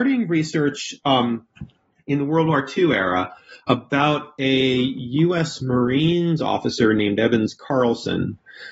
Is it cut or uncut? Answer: cut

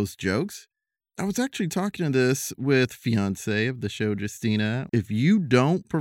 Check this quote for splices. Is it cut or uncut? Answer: cut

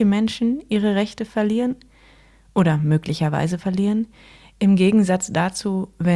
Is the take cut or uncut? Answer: uncut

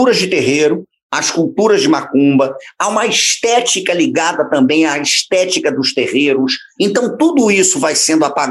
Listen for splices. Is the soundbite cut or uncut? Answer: cut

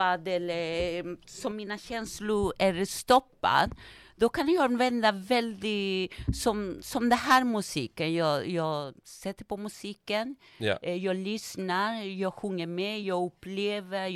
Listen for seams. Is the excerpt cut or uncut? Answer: uncut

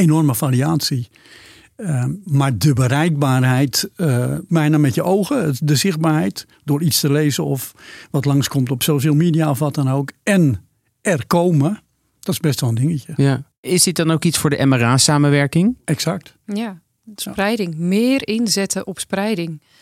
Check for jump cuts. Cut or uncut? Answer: cut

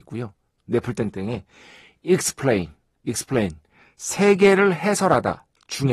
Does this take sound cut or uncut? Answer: uncut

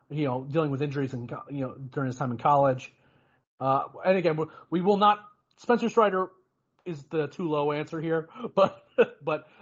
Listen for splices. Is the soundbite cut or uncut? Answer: cut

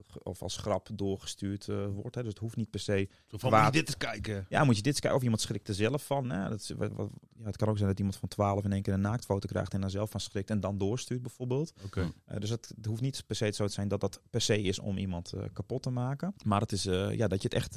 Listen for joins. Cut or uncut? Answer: cut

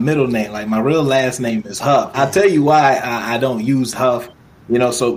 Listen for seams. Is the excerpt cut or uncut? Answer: cut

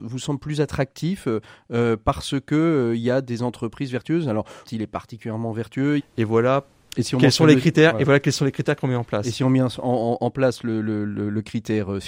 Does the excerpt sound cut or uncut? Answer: cut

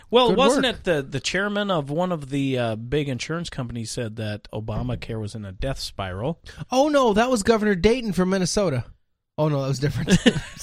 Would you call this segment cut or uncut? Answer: cut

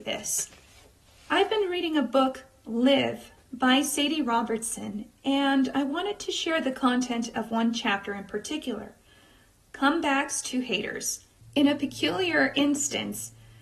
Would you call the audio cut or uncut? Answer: cut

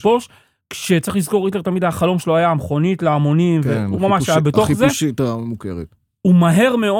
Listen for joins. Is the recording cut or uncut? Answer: uncut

